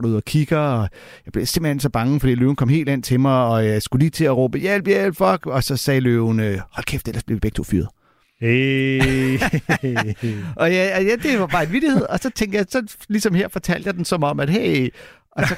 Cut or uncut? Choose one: uncut